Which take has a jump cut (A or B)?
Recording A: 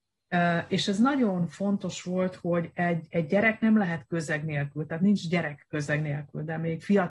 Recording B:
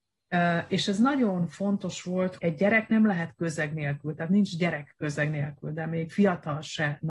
B